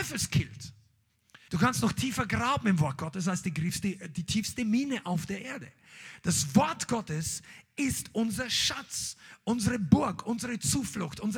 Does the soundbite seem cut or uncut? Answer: cut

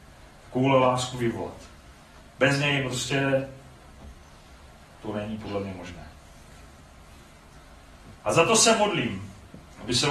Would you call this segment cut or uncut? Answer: cut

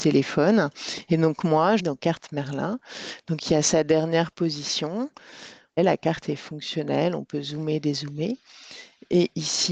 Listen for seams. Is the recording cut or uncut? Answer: cut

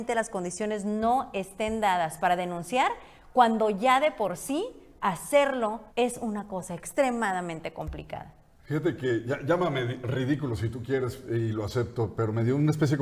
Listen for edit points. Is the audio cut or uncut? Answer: cut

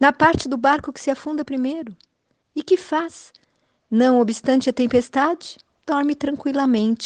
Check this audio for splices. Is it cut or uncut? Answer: uncut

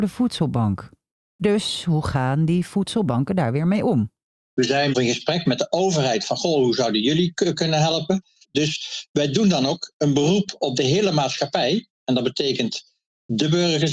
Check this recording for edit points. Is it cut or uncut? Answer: cut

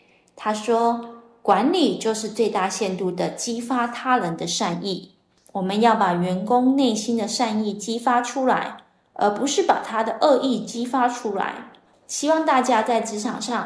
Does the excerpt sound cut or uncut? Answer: uncut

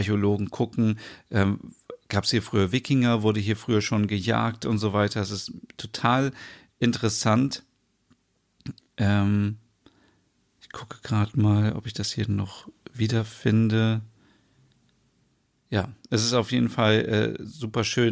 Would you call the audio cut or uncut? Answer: uncut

